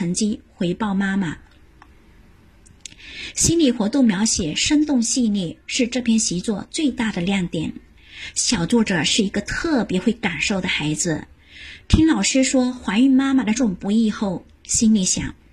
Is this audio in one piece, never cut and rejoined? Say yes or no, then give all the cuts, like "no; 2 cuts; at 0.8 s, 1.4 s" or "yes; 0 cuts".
no; 1 cut; at 13.6 s